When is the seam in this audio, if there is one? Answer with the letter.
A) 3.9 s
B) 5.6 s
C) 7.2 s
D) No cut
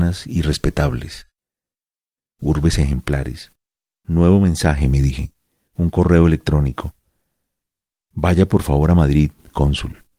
A